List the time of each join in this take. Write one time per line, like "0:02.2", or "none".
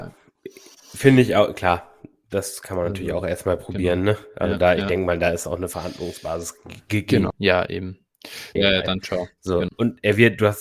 0:07.3
0:08.6
0:09.7

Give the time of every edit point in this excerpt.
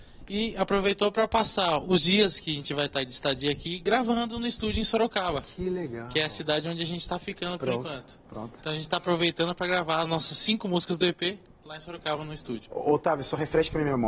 none

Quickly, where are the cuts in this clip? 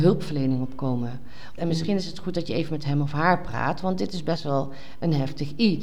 0:01.6

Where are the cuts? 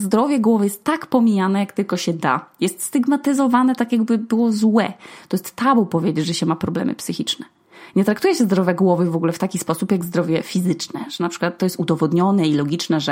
none

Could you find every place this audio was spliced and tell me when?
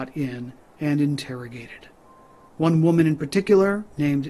0:02.5

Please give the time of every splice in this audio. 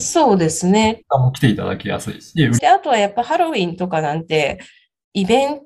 0:01.0
0:02.6

